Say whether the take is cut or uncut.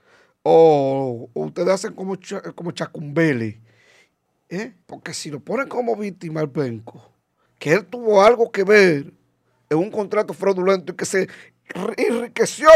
cut